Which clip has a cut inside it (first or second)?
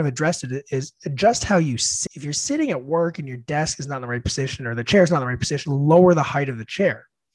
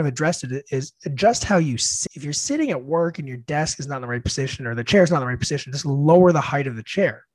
first